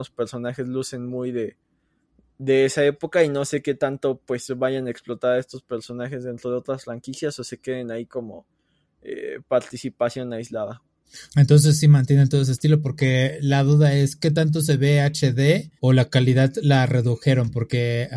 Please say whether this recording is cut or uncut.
cut